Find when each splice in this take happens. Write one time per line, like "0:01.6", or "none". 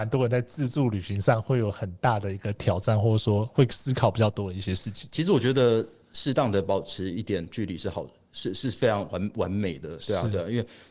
none